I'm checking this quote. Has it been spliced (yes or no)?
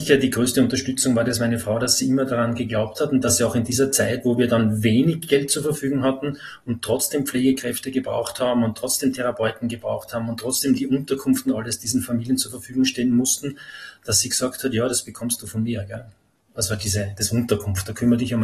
no